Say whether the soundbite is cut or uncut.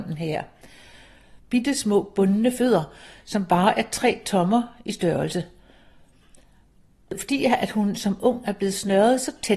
cut